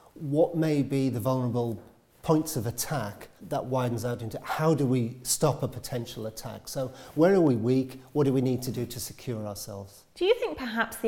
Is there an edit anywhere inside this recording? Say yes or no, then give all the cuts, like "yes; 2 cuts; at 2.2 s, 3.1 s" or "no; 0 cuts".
no; 0 cuts